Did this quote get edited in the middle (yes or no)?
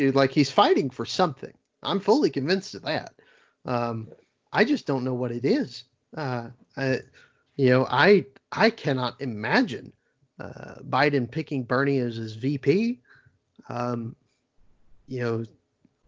no